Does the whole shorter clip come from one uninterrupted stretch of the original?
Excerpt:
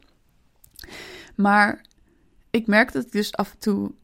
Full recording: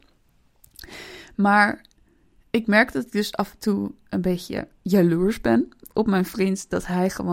yes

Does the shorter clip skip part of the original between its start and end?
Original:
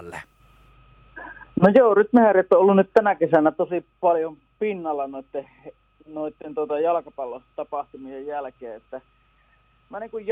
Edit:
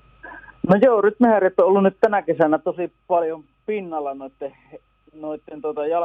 no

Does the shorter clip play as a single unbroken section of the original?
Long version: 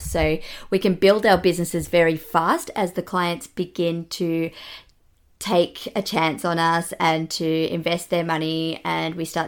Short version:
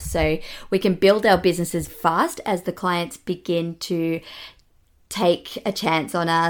no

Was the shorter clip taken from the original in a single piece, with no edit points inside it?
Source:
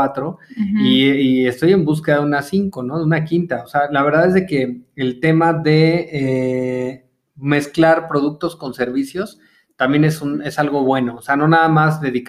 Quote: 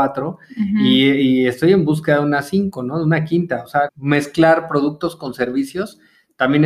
no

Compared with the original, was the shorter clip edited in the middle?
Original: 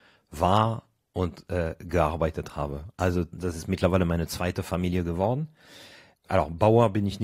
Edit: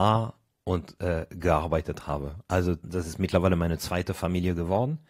no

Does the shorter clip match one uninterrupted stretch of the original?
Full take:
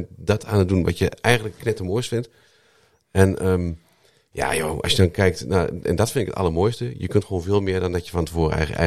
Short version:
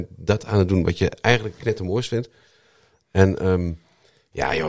yes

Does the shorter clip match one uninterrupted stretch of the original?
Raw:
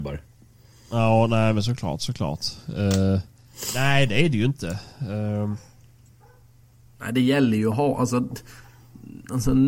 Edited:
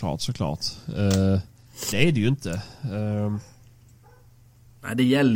no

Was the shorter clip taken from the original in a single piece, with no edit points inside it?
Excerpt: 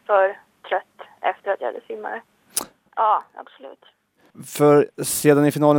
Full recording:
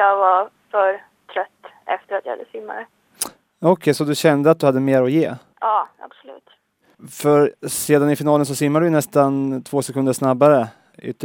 no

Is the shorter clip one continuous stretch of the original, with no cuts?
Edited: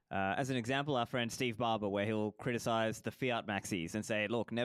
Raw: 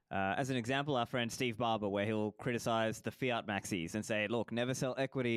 yes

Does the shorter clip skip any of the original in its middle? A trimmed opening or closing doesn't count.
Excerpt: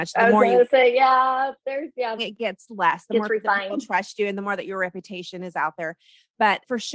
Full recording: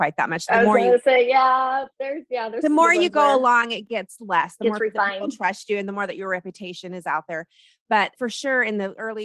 yes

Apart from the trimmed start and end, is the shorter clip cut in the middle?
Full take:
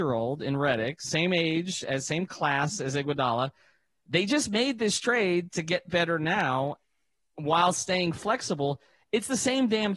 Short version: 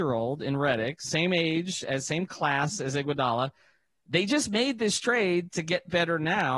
no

